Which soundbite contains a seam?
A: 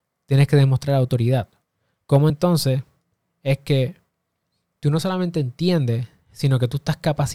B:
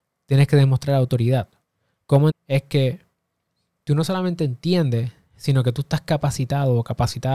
B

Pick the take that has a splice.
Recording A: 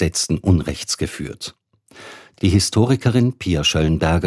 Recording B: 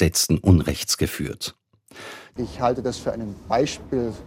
B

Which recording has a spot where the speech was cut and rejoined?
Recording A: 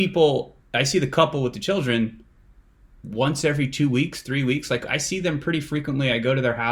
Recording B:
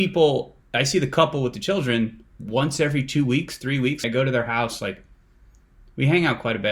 B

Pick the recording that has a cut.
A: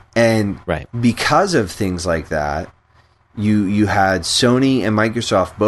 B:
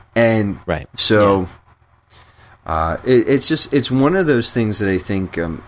B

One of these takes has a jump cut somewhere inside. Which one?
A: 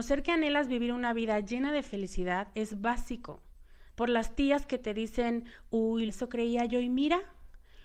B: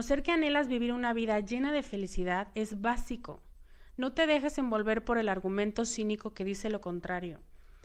A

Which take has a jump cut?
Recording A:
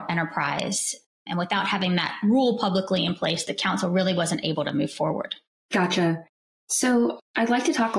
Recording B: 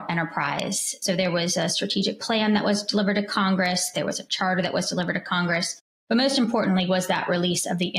B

